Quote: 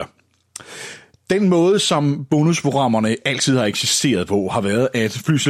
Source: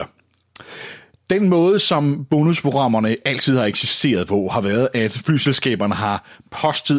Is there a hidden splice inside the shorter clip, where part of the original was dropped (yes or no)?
no